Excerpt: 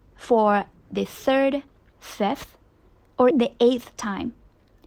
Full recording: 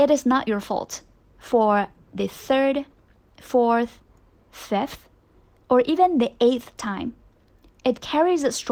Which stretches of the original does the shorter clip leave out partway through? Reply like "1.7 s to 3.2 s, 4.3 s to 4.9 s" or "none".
3.1 s to 4.4 s, 5.8 s to 6.1 s